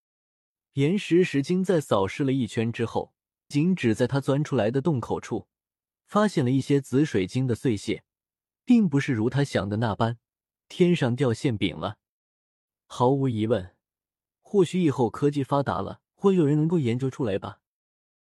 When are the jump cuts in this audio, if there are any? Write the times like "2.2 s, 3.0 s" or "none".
3.5 s, 14.3 s, 16.1 s